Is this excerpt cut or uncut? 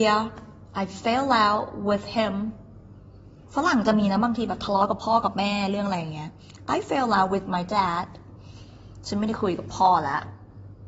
uncut